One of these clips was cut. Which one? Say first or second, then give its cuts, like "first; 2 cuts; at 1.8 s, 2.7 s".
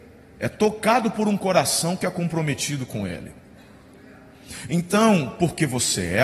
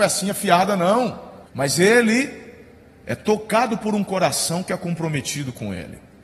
second; 1 cut; at 1.5 s